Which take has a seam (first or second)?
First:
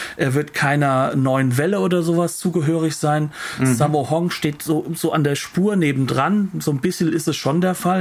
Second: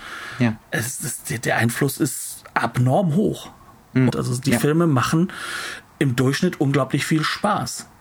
second